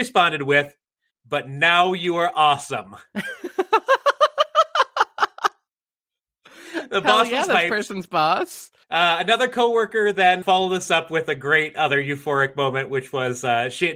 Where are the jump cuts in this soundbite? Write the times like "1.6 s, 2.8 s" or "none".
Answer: 1.1 s, 10.4 s